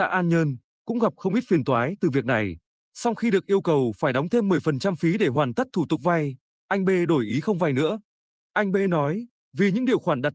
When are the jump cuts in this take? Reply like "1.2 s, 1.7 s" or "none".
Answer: 2.8 s